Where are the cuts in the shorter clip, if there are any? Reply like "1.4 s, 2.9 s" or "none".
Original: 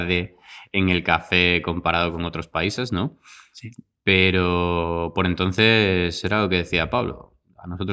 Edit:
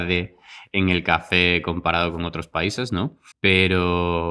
3.3 s